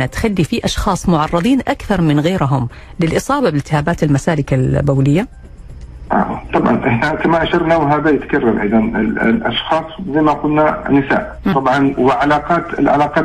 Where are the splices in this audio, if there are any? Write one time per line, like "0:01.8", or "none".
0:11.5

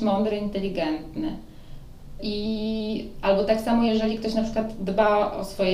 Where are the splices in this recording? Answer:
0:02.2

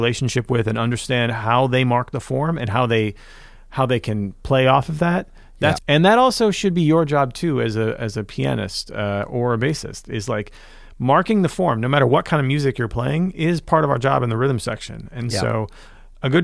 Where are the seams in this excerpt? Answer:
0:05.8

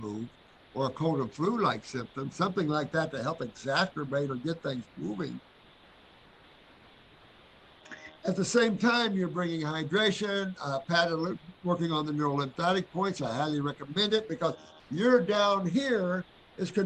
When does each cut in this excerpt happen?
0:08.1

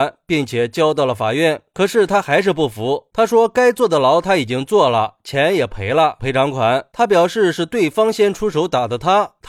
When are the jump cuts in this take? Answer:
0:06.2

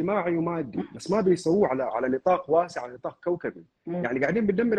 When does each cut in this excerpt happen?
none

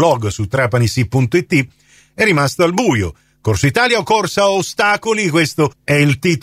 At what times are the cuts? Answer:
none

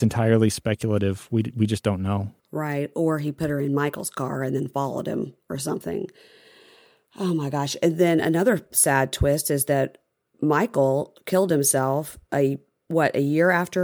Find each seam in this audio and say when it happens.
0:02.4
0:10.3

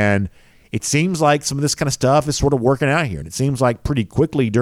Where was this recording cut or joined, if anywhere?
none

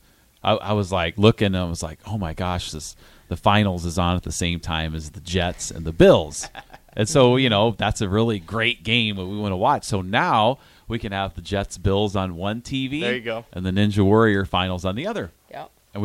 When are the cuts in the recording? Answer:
none

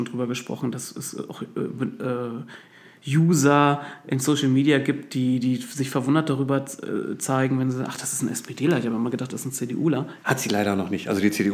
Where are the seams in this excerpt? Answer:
0:10.2

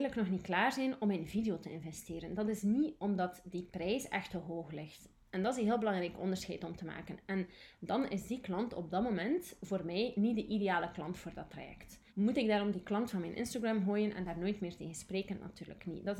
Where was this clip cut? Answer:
0:12.1

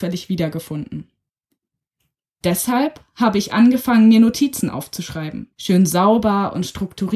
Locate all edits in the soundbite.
0:05.5

